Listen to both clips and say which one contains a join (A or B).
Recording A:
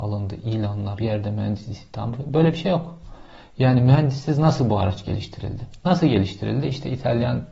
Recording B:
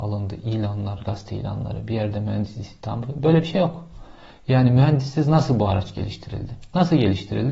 A